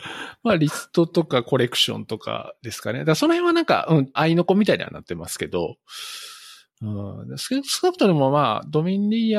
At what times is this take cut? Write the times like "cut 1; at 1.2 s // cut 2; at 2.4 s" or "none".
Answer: cut 1; at 4.2 s

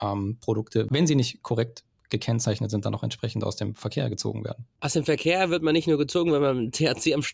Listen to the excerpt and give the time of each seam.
none

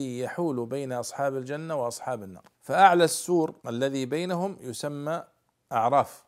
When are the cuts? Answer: cut 1; at 2.5 s // cut 2; at 3.6 s

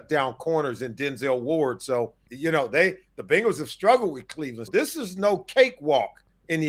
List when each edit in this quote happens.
cut 1; at 2.3 s // cut 2; at 4.7 s

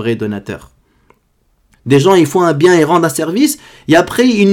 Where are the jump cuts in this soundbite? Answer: cut 1; at 1.7 s

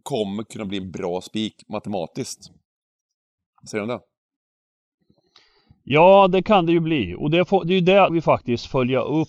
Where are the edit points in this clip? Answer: cut 1; at 8.1 s

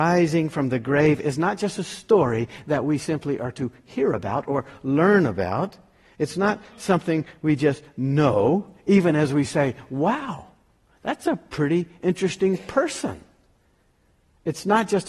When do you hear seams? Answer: none

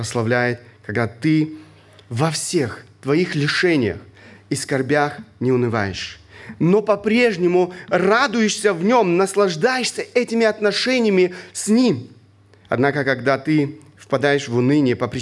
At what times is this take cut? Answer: cut 1; at 12.6 s

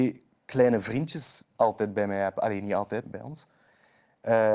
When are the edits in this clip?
cut 1; at 1.5 s // cut 2; at 3.0 s

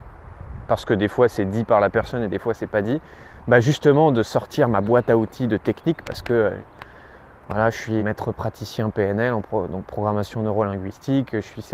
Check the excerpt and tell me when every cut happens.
cut 1; at 8.0 s

